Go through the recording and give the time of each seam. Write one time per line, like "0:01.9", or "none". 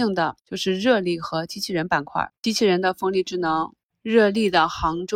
0:02.3